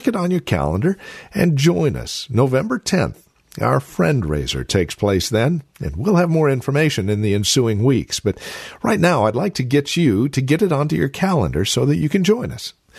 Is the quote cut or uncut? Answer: uncut